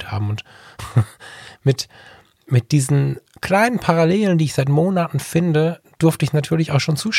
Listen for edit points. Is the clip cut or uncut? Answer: uncut